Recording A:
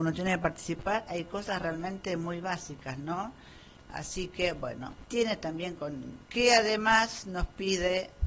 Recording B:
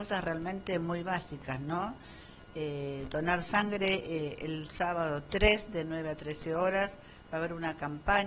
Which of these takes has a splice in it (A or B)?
A